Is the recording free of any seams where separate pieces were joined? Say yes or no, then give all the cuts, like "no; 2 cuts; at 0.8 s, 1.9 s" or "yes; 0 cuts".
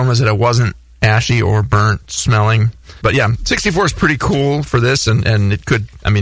no; 1 cut; at 3.0 s